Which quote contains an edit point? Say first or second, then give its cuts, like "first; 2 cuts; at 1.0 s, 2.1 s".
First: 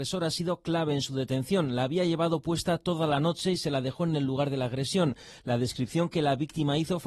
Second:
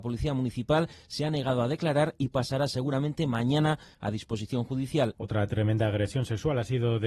second; 1 cut; at 5.1 s